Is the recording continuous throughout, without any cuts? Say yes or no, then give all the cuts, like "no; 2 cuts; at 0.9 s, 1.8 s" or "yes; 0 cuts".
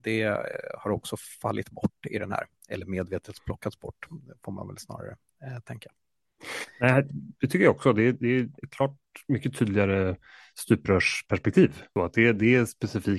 yes; 0 cuts